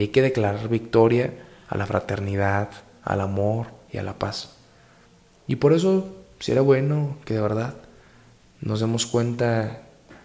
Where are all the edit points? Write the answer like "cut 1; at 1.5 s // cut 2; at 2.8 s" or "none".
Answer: none

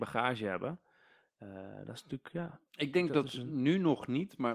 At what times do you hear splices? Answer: none

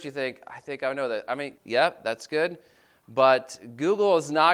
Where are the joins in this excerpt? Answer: cut 1; at 1.6 s

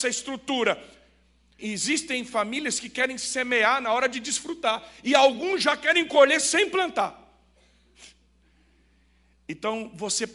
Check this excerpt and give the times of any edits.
cut 1; at 1.6 s

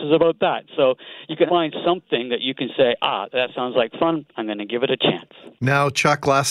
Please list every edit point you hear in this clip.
cut 1; at 1.5 s

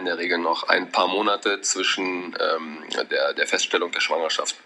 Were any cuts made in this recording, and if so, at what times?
cut 1; at 3.1 s

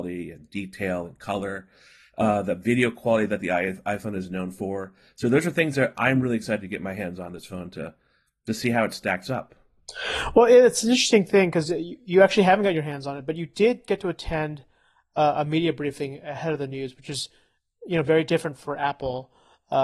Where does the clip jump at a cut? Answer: none

